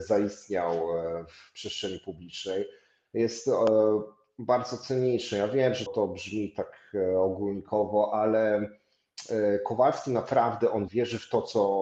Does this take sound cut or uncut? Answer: cut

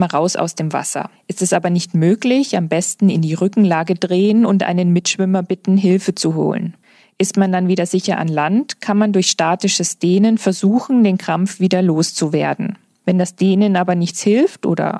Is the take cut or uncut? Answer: uncut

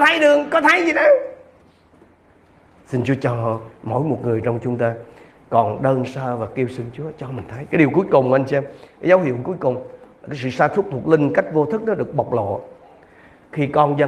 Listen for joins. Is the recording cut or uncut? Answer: uncut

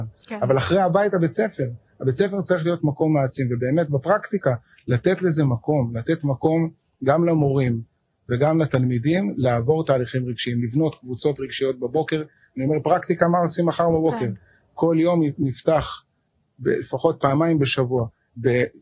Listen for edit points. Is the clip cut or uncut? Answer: uncut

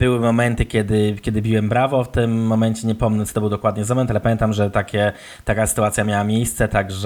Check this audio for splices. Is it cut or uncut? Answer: uncut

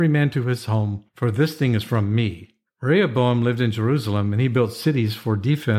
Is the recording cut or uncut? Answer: cut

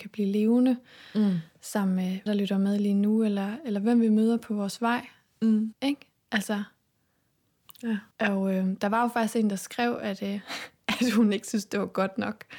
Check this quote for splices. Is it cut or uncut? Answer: cut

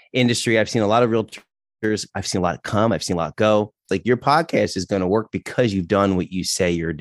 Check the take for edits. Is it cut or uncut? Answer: cut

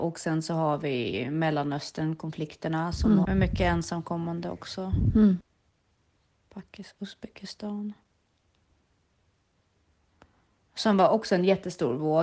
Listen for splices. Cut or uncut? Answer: cut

